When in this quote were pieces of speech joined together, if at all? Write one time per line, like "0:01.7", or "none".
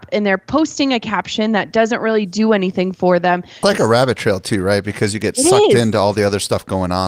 0:03.6